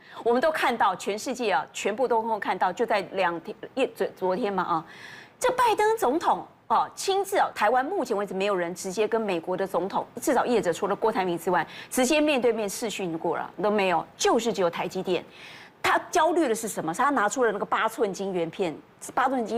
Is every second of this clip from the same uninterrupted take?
no; 1 cut; at 7.5 s

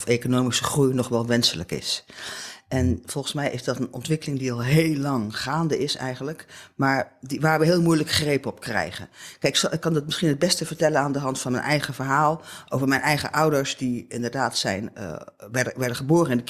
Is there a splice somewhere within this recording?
no; 0 cuts

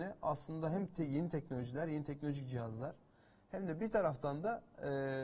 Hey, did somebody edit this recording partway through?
no; 0 cuts

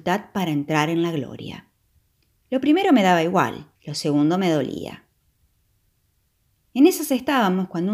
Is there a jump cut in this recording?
yes; 2 cuts; at 2.3 s, 3.8 s

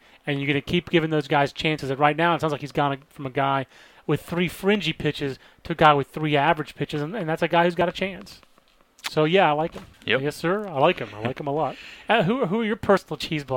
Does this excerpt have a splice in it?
yes; 1 cut; at 9.9 s

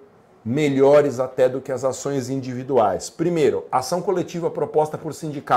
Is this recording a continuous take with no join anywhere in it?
yes; 0 cuts

